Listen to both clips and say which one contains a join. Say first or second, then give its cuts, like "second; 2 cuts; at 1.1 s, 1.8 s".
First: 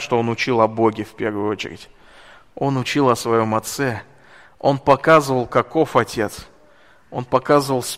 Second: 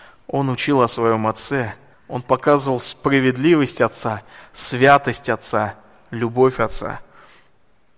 second; 1 cut; at 1.9 s